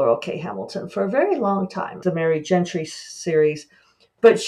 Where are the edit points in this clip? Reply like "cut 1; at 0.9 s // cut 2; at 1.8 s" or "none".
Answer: cut 1; at 2.0 s